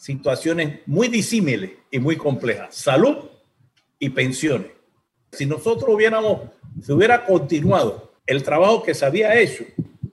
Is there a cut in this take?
yes; 2 cuts; at 5.3 s, 8.2 s

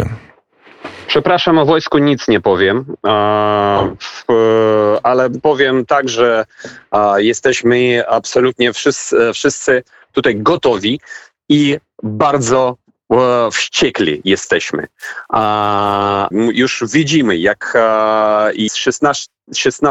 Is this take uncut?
no; 2 cuts; at 16.3 s, 18.7 s

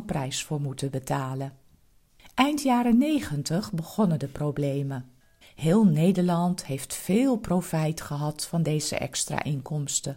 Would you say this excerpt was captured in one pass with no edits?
no; 1 cut; at 5.4 s

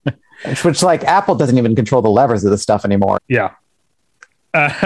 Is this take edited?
yes; 1 cut; at 3.2 s

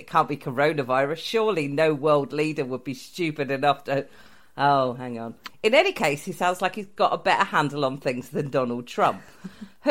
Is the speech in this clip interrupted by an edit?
yes; 1 cut; at 5.5 s

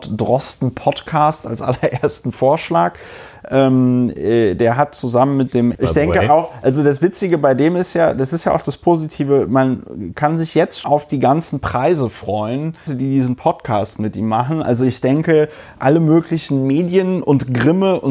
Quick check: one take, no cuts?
no; 3 cuts; at 5.7 s, 10.8 s, 12.9 s

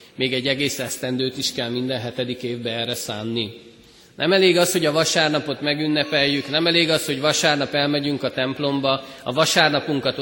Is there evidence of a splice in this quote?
no; 0 cuts

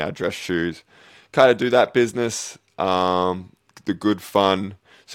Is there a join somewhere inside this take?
no; 0 cuts

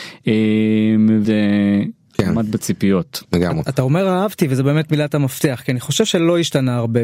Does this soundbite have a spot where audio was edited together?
yes; 2 cuts; at 1.2 s, 3.2 s

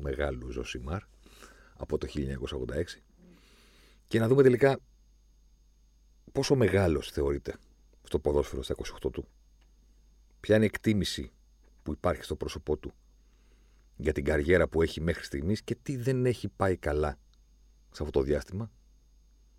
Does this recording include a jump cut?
no; 0 cuts

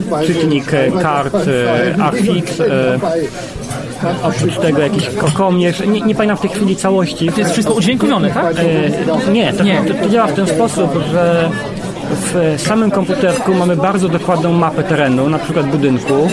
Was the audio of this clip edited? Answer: no; 0 cuts

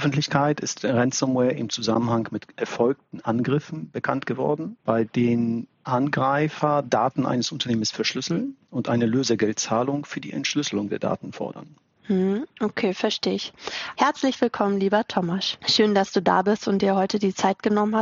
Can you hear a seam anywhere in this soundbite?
yes; 2 cuts; at 4.8 s, 13.9 s

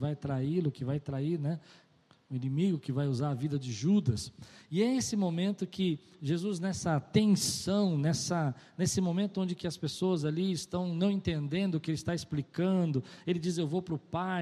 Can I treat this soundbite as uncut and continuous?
yes; 0 cuts

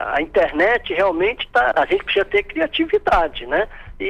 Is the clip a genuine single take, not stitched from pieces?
no; 1 cut; at 1.7 s

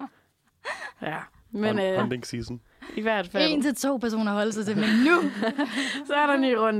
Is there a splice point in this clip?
no; 0 cuts

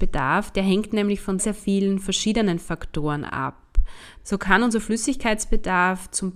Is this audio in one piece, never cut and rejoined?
no; 2 cuts; at 1.4 s, 4.2 s

